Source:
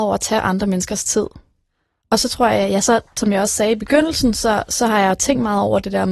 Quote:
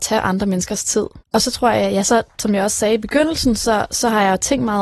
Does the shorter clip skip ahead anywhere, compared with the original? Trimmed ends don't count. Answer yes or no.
yes